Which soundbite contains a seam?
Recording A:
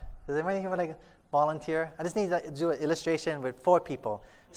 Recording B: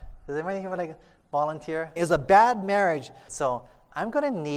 B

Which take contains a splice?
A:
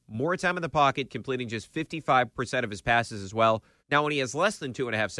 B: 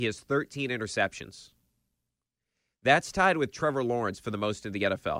A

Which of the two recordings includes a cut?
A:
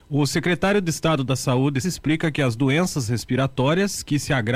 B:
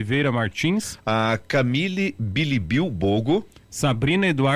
A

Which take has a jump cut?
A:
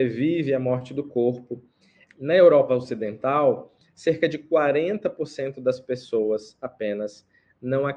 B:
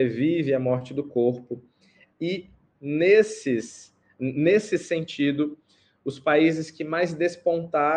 A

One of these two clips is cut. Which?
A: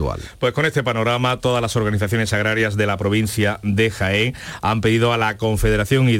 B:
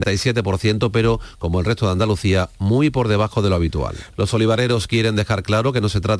B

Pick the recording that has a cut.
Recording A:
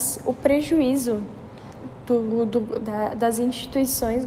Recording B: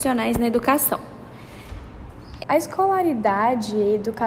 B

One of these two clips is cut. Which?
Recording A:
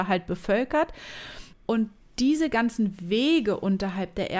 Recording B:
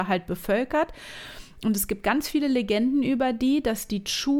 A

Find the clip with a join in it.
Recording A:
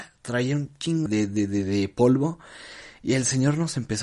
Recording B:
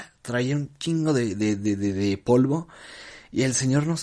A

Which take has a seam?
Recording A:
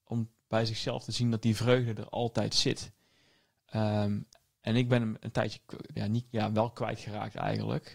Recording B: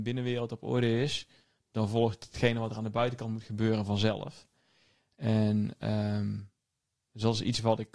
A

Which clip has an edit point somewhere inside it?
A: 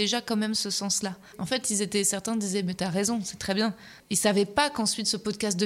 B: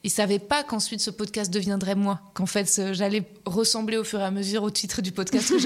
A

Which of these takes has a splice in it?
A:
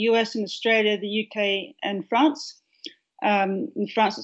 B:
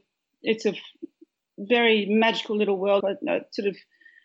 B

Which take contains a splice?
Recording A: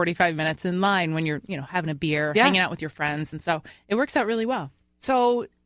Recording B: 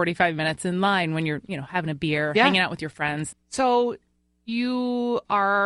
B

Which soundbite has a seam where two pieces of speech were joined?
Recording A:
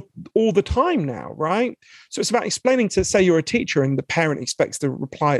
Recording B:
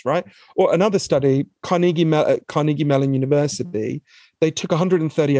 B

